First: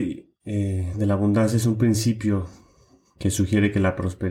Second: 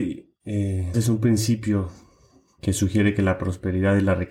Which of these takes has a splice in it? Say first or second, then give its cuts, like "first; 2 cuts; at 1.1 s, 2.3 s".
second; 1 cut; at 0.9 s